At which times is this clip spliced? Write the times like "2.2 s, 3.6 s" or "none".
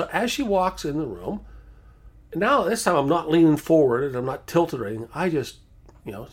none